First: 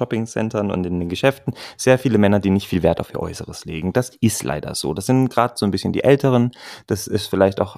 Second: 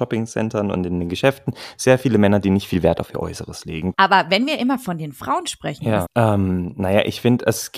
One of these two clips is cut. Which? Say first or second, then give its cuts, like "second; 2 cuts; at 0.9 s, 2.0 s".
second; 2 cuts; at 3.9 s, 6.0 s